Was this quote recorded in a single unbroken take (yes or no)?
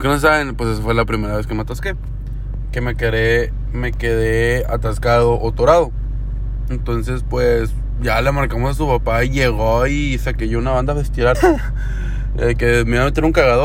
no